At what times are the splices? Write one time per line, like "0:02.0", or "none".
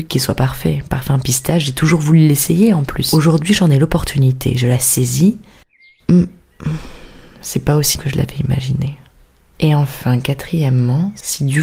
0:08.0